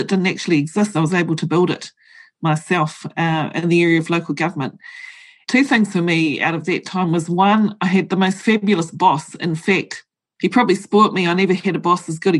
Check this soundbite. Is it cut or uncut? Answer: uncut